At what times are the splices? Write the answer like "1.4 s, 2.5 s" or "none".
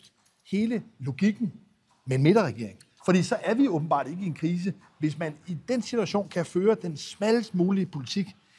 none